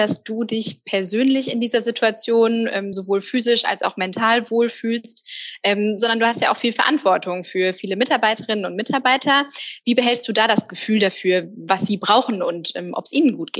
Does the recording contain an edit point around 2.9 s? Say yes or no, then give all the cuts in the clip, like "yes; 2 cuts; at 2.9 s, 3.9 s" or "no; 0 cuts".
no; 0 cuts